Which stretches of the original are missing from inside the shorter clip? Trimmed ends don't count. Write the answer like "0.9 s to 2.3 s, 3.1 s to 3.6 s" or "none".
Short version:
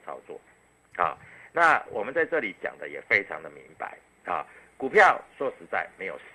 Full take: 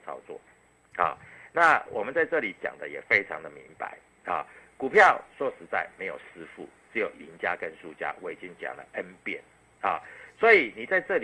none